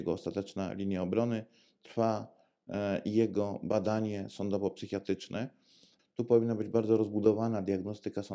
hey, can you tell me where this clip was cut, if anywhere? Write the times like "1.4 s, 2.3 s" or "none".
6.0 s